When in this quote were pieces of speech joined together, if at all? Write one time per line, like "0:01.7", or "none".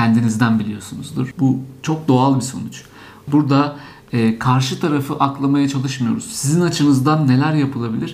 0:01.3
0:03.3